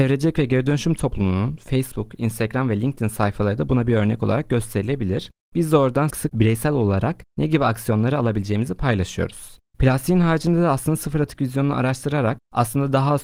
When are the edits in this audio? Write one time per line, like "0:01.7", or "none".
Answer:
0:06.1
0:09.7